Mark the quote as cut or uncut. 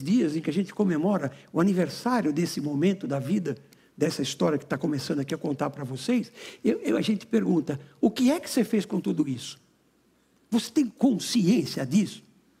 uncut